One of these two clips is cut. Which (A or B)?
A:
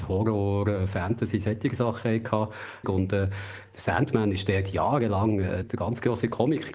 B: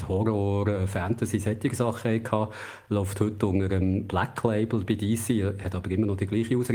A